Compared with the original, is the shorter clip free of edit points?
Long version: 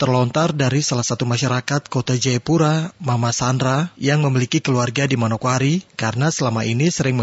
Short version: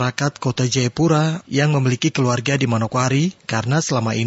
no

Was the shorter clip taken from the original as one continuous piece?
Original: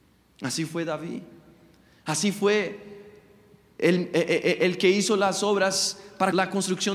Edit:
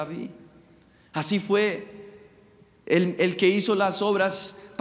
no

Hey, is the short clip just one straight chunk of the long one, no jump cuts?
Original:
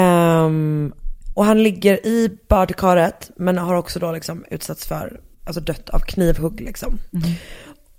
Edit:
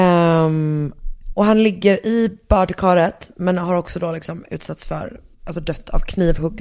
yes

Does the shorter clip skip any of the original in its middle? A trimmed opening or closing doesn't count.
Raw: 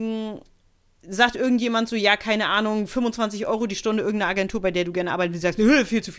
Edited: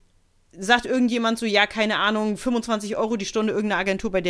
no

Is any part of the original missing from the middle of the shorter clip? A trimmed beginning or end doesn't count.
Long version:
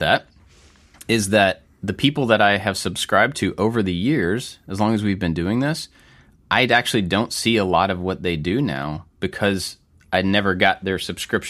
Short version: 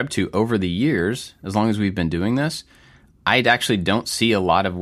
no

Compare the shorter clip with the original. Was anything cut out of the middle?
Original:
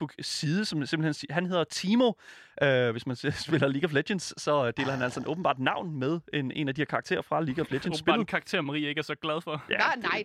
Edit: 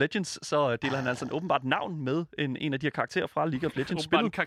no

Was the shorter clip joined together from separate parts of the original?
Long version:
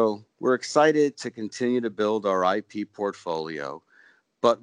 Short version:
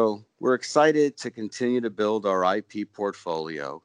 no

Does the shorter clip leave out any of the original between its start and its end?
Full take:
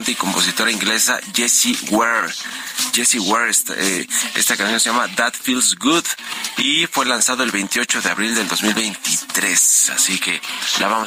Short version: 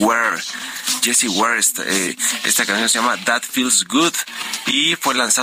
no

